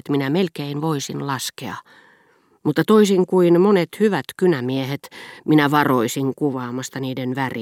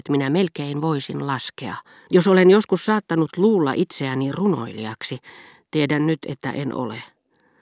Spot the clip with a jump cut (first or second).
second